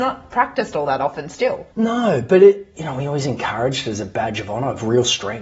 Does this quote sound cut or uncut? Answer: cut